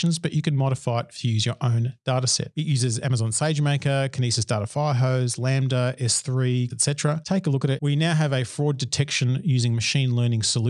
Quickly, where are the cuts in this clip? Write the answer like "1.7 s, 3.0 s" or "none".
6.7 s, 7.8 s